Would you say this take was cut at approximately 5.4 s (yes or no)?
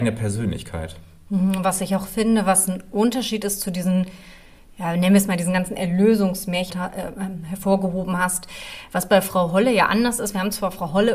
no